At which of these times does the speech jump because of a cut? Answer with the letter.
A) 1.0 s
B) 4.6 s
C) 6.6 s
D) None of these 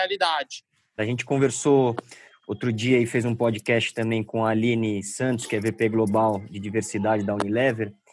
A